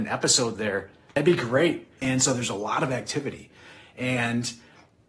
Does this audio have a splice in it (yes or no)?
yes